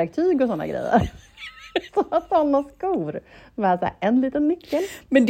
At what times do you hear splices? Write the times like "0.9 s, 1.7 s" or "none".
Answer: none